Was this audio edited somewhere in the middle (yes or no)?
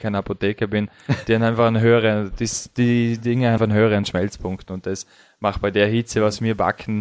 yes